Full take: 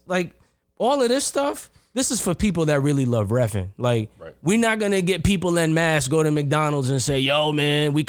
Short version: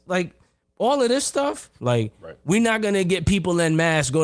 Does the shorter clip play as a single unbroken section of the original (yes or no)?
no